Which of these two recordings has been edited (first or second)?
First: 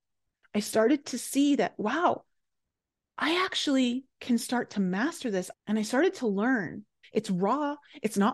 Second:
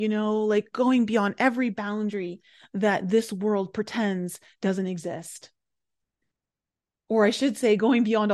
first